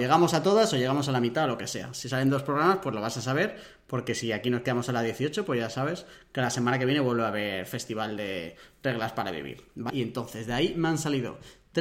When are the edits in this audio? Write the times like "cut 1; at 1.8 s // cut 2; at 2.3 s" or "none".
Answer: cut 1; at 9.9 s